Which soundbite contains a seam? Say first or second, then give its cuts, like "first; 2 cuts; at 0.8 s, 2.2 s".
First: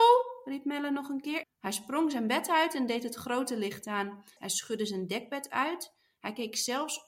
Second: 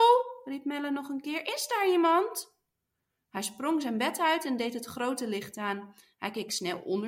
first; 2 cuts; at 1.4 s, 4.4 s